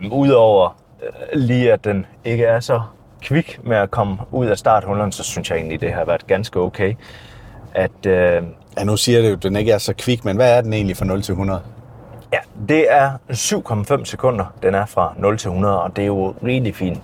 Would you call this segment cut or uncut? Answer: uncut